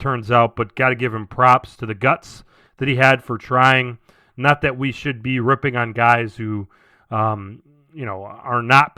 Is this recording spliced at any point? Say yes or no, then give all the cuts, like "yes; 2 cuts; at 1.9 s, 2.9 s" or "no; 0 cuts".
no; 0 cuts